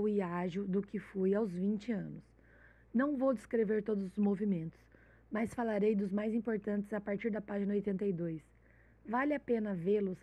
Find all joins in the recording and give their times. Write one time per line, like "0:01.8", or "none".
none